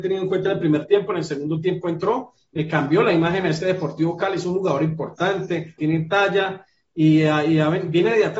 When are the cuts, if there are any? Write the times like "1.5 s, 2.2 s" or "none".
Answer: 5.8 s